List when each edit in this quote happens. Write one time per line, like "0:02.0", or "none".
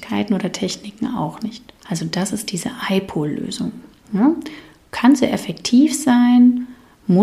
0:01.8